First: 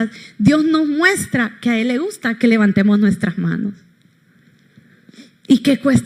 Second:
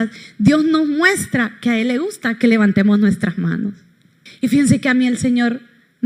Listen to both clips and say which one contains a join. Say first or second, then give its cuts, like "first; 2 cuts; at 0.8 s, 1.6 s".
second; 1 cut; at 4.3 s